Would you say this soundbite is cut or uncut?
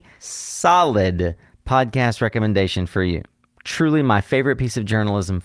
uncut